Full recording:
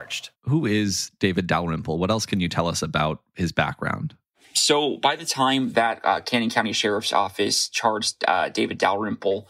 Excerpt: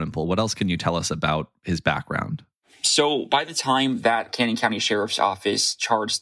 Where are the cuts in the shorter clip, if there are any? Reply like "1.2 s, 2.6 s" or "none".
4.3 s